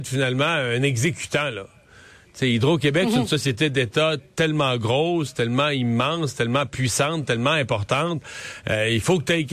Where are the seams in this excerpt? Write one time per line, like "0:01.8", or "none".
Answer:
none